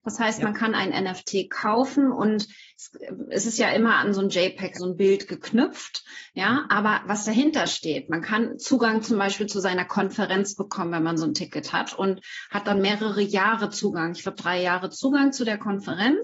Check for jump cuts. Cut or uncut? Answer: cut